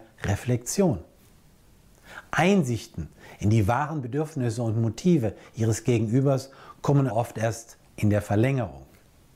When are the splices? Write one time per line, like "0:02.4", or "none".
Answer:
0:07.1